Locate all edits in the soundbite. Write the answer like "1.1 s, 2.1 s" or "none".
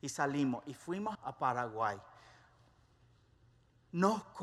1.2 s